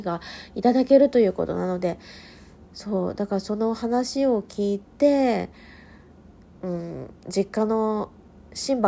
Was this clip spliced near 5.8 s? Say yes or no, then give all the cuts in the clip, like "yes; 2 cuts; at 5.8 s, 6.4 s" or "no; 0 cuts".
no; 1 cut; at 2.7 s